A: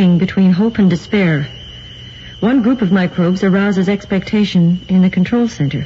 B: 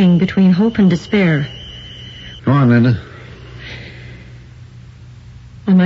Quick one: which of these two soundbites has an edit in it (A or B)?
B